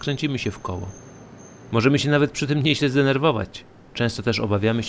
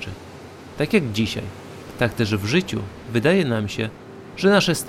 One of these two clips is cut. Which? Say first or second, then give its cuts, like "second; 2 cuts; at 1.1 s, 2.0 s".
second; 1 cut; at 1.9 s